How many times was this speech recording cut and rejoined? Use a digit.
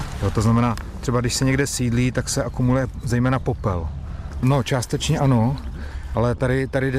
1